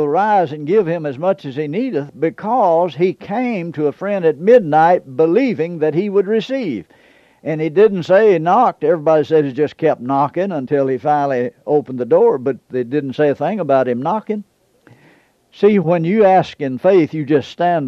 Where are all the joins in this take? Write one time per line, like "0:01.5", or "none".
none